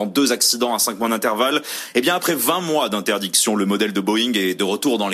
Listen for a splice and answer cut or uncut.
uncut